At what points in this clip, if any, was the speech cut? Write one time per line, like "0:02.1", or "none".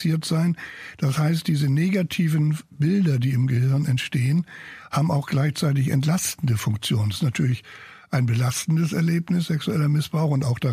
none